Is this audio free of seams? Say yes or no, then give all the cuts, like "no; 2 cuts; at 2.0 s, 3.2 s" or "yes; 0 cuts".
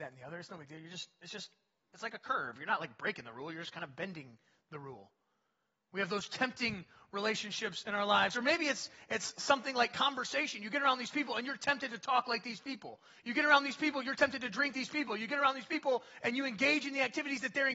no; 1 cut; at 14.7 s